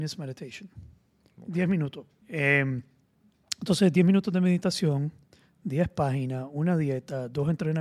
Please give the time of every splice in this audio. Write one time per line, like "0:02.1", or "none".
0:02.2